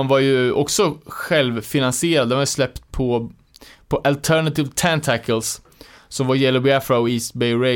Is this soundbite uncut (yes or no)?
yes